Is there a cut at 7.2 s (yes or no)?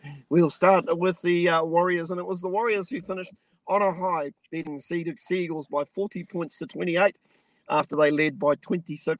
no